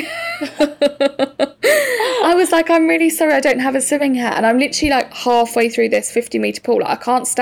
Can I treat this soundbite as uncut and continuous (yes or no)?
yes